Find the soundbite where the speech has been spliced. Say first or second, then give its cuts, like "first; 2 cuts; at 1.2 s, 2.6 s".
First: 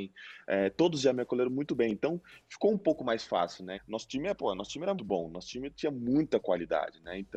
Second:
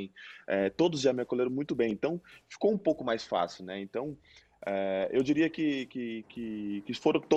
first; 2 cuts; at 3.7 s, 5.0 s